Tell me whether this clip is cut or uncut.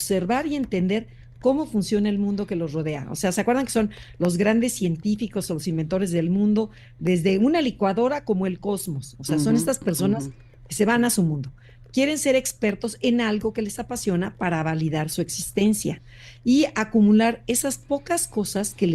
uncut